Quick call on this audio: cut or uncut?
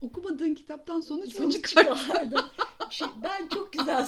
uncut